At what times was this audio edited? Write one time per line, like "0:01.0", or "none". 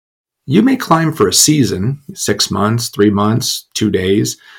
none